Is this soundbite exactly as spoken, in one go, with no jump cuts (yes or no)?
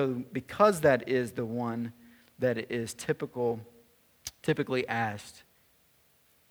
yes